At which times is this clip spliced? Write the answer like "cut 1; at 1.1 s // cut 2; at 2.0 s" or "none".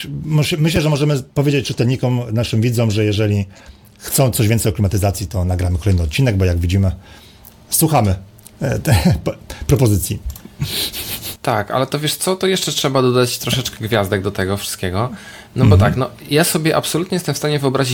cut 1; at 11.4 s